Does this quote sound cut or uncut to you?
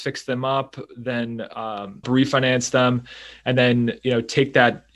cut